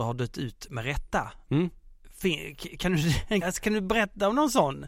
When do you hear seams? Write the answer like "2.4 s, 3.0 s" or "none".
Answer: 3.4 s